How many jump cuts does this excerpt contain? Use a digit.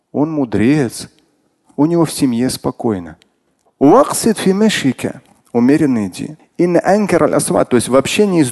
2